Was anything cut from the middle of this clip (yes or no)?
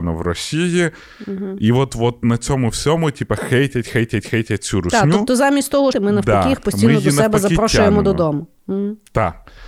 yes